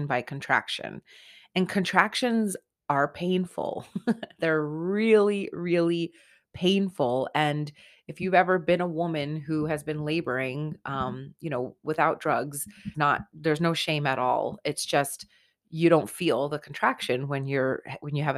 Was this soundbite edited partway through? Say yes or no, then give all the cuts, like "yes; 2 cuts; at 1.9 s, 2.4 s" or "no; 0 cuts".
yes; 1 cut; at 12.9 s